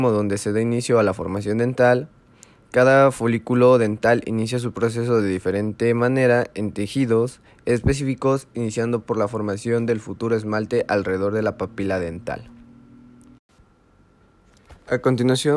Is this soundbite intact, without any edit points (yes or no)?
yes